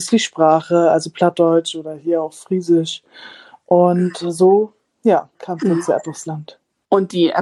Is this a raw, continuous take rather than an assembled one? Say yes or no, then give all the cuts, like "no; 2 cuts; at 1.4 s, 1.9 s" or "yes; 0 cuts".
no; 1 cut; at 5.3 s